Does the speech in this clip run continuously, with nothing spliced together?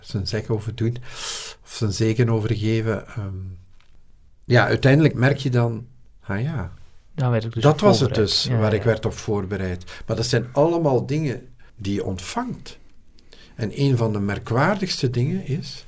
yes; 0 cuts

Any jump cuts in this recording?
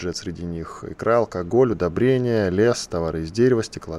no; 0 cuts

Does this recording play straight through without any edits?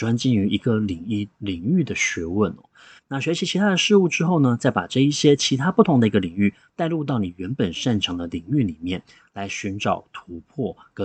no; 1 cut; at 3.0 s

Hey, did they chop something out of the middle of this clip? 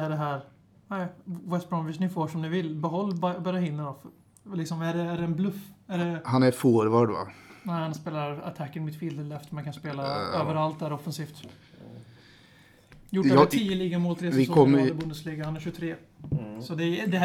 no; 0 cuts

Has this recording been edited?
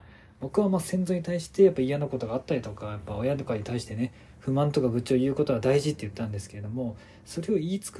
no; 0 cuts

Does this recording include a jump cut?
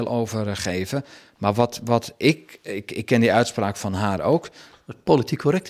no; 0 cuts

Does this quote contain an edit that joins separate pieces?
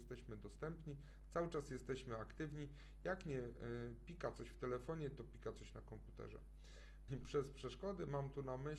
yes; 1 cut; at 7.1 s

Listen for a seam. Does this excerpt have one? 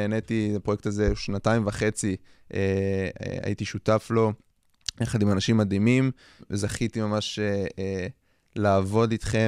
no; 0 cuts

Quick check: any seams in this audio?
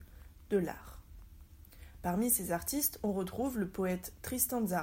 no; 0 cuts

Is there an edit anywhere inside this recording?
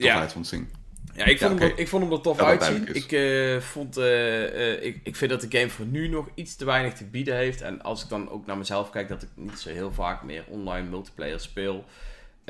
no; 0 cuts

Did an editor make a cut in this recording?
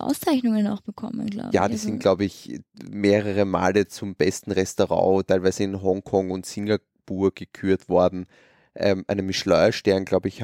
no; 0 cuts

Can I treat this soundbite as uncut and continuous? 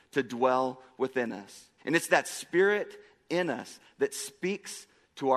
no; 1 cut; at 1.8 s

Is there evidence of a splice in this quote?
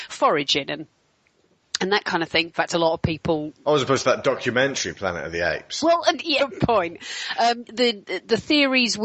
yes; 3 cuts; at 2.5 s, 6.4 s, 7.7 s

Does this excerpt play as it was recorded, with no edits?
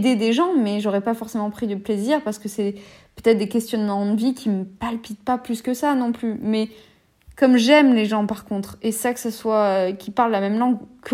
yes; 0 cuts

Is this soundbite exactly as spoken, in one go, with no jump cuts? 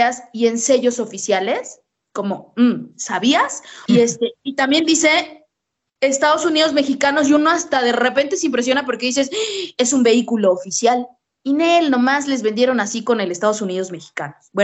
no; 1 cut; at 3.9 s

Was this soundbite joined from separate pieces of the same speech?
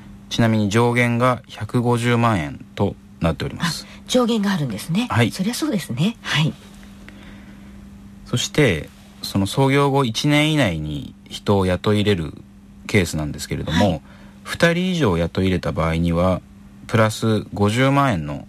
yes; 1 cut; at 6.2 s

